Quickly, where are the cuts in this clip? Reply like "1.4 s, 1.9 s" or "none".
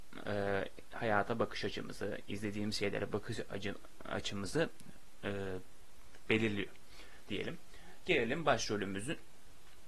none

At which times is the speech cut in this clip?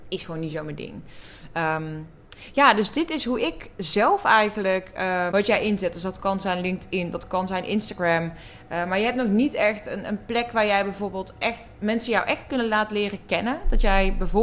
5.3 s

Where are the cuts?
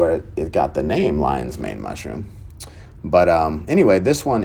none

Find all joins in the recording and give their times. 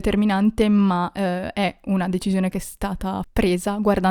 none

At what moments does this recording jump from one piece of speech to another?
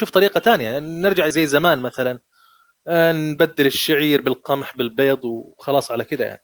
1.3 s

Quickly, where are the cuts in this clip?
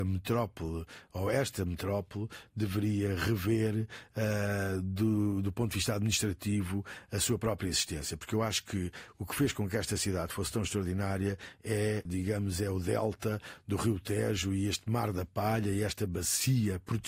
12.1 s

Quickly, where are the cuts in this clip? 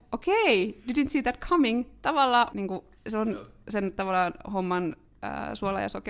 2.5 s

